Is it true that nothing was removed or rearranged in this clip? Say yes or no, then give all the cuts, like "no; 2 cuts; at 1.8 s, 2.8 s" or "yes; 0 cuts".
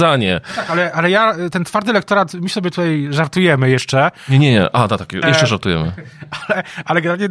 no; 1 cut; at 5.2 s